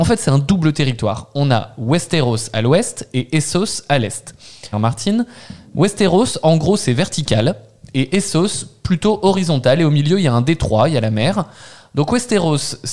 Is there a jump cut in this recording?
yes; 1 cut; at 4.7 s

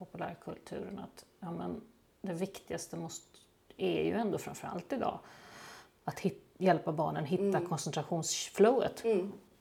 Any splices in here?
no; 0 cuts

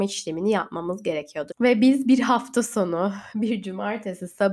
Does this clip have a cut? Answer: yes; 1 cut; at 1.5 s

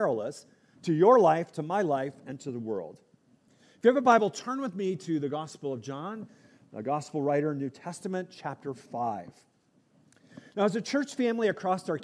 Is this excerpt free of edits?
yes; 0 cuts

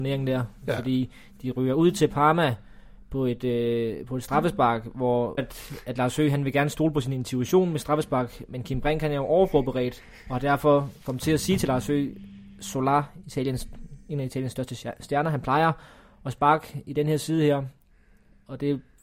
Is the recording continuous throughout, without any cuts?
no; 2 cuts; at 5.4 s, 11.0 s

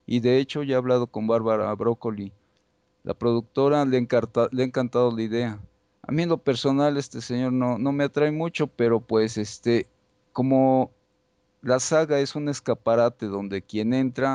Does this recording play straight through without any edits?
yes; 0 cuts

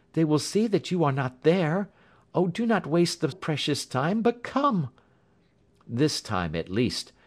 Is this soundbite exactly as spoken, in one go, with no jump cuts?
no; 1 cut; at 3.3 s

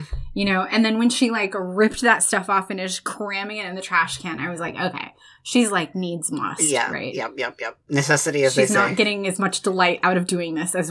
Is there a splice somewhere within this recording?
no; 0 cuts

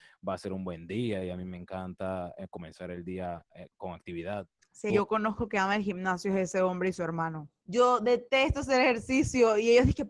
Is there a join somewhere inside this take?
yes; 3 cuts; at 3.7 s, 4.9 s, 7.6 s

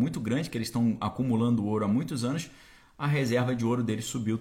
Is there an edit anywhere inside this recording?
no; 0 cuts

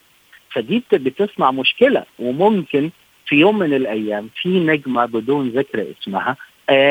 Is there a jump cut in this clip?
no; 0 cuts

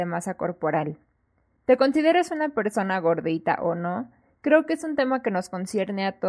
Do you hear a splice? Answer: no; 0 cuts

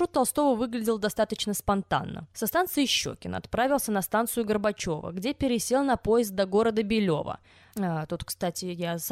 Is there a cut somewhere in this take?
yes; 2 cuts; at 2.3 s, 7.7 s

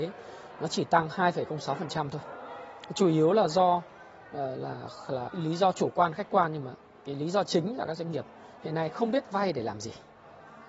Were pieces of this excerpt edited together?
yes; 1 cut; at 5.3 s

